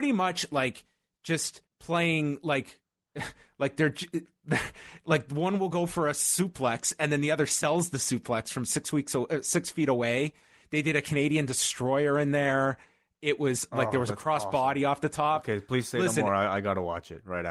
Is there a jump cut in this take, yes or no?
yes